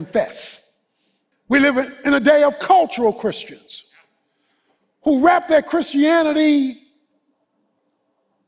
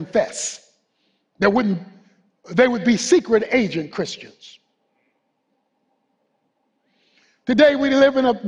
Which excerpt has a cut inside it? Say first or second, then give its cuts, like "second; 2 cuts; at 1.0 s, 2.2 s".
first; 1 cut; at 1.3 s